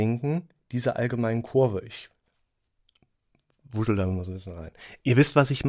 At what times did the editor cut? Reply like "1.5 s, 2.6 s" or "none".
none